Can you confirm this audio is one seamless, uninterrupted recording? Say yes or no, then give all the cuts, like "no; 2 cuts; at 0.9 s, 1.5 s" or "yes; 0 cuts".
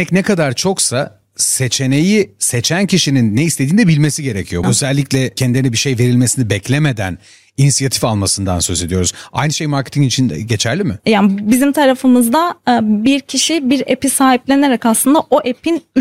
no; 2 cuts; at 4.6 s, 11.0 s